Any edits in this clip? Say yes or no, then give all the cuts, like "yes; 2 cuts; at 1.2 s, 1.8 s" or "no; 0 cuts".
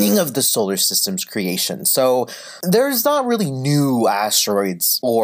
no; 0 cuts